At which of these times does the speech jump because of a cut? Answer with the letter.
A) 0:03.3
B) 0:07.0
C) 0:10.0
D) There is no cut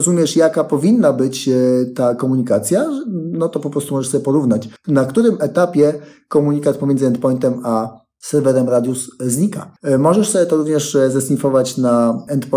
D